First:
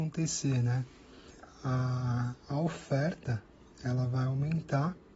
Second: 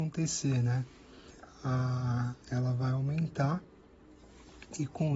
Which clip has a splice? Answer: second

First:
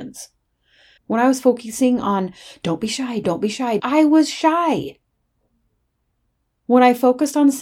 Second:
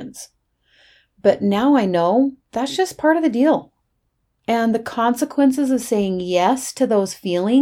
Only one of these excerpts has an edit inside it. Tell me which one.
first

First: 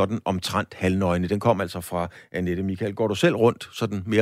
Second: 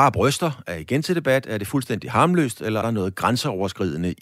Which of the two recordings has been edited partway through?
second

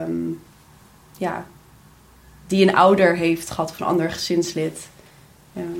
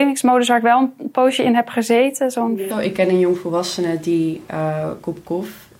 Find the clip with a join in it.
second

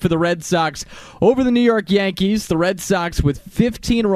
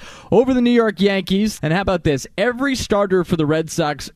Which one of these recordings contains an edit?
second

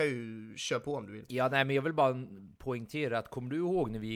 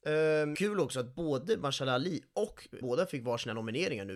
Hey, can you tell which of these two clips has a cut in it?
second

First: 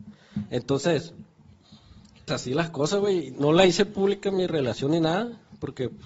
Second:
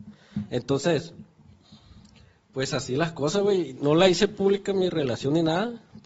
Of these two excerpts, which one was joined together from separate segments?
first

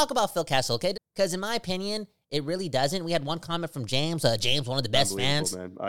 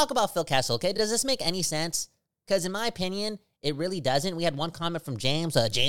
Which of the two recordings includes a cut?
first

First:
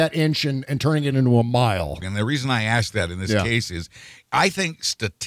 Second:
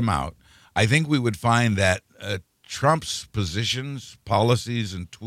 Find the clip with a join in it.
first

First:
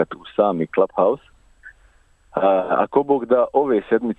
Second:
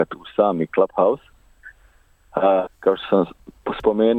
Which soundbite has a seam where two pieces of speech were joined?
second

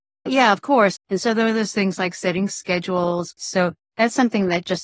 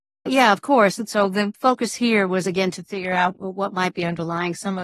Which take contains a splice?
first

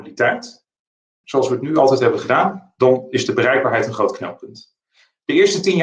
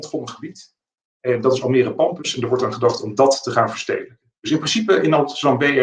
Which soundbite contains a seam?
first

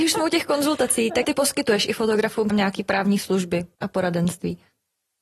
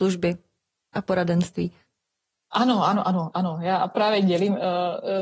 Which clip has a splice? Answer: first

